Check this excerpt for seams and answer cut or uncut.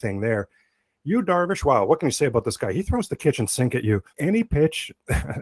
cut